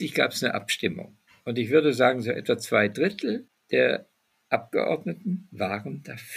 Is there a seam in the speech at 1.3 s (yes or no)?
no